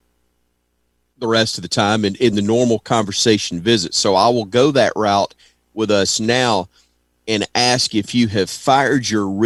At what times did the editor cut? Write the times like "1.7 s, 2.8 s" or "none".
none